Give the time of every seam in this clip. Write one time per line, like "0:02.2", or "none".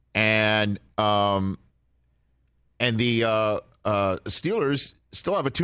none